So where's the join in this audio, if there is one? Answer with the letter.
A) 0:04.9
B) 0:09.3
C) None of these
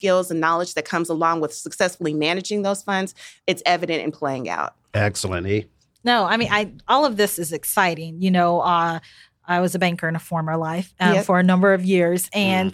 C